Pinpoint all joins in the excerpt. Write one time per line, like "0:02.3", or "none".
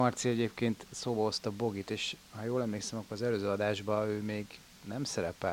none